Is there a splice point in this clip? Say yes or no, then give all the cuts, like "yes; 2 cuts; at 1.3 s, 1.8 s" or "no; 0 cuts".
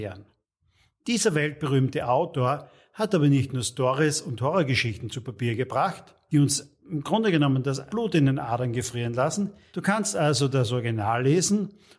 yes; 1 cut; at 9.7 s